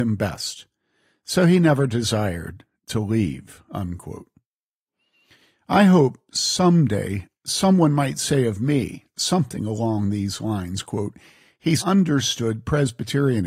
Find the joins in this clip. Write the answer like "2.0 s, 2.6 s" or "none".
11.8 s